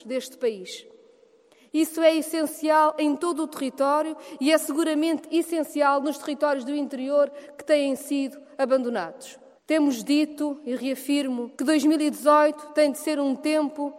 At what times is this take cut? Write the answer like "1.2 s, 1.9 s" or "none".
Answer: 9.6 s, 11.5 s

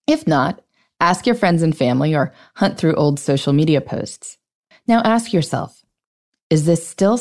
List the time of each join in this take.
4.7 s

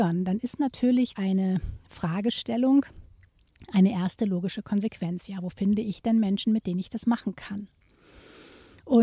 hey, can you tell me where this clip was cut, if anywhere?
1.1 s

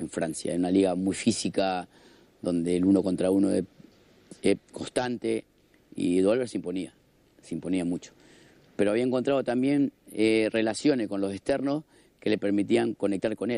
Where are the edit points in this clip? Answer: none

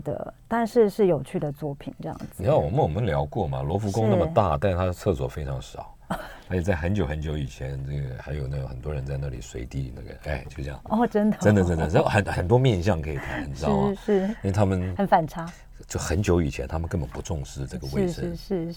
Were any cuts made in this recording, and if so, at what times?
none

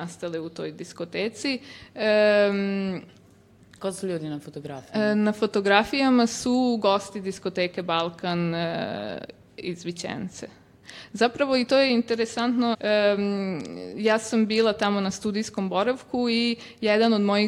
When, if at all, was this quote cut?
12.7 s

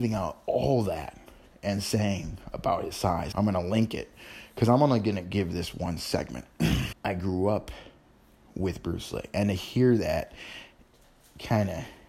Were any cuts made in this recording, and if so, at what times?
3.3 s, 6.9 s

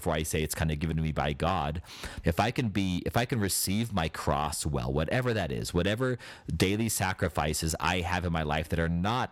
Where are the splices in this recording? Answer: 2.2 s

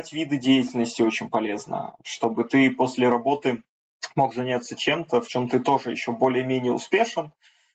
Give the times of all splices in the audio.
none

